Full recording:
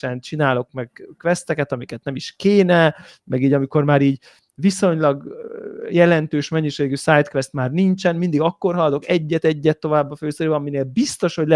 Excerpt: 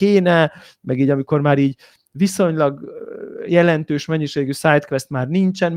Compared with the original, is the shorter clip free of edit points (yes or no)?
yes